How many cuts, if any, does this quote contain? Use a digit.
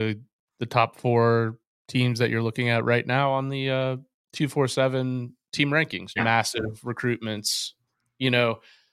1